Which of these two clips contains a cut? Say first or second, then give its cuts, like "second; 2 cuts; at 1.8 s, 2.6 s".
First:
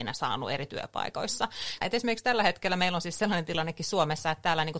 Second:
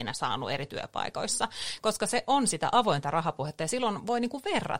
first; 1 cut; at 1.8 s